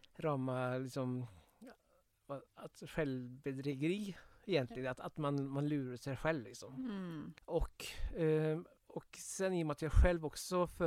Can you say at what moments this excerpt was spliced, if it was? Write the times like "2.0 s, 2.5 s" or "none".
7.4 s, 8.8 s